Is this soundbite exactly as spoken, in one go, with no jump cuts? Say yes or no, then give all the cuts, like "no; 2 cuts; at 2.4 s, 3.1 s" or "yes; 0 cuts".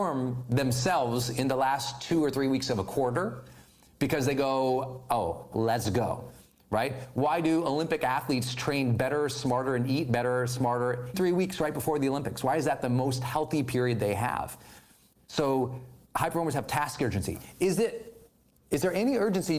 no; 3 cuts; at 5.5 s, 11.1 s, 15.1 s